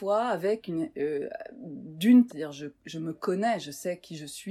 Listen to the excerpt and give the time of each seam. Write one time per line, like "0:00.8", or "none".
0:02.3